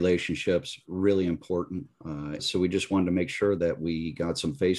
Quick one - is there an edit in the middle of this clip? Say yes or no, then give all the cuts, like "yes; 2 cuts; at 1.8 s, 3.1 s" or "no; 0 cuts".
yes; 1 cut; at 2.4 s